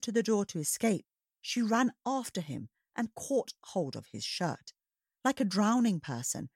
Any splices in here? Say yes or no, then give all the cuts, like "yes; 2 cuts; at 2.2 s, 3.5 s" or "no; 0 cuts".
no; 0 cuts